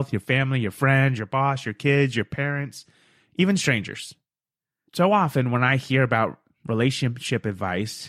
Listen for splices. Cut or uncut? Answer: cut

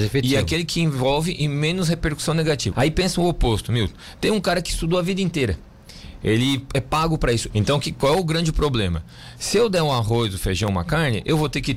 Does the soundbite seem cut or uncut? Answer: cut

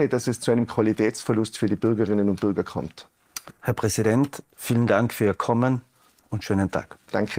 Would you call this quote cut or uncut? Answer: uncut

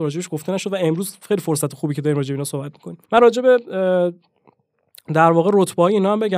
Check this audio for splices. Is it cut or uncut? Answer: cut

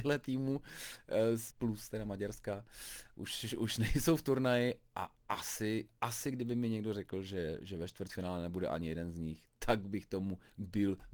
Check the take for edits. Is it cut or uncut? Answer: cut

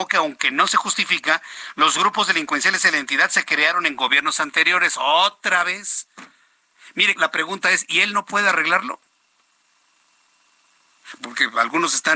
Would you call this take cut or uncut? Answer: cut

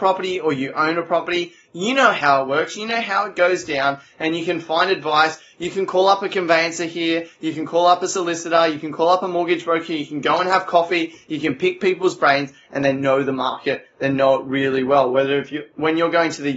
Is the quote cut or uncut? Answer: uncut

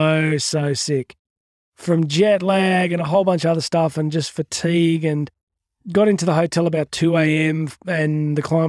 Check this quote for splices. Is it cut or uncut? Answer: uncut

